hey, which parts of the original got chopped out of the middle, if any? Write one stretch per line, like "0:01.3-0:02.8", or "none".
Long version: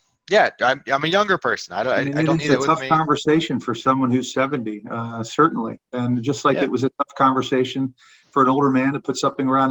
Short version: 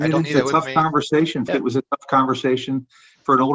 0:03.6-0:06.6